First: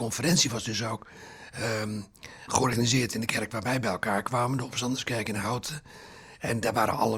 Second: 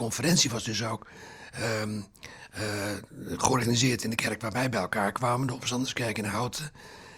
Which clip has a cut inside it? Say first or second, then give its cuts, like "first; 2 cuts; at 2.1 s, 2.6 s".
first; 1 cut; at 2.5 s